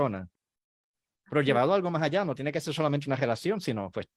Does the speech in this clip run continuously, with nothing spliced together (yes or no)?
yes